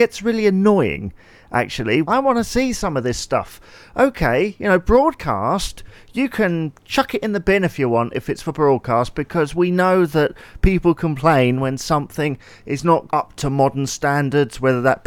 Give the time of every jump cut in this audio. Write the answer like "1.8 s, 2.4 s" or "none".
2.0 s, 13.1 s